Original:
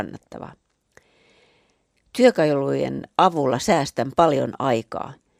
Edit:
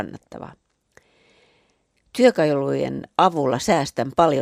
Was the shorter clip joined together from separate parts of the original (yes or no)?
no